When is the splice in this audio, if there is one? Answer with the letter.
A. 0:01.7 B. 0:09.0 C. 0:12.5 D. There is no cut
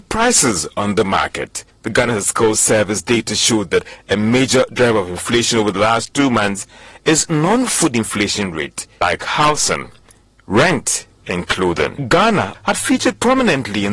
C